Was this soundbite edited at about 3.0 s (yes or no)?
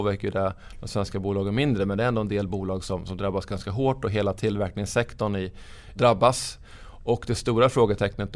no